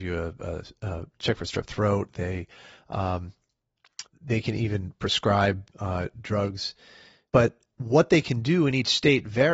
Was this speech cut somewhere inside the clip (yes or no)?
yes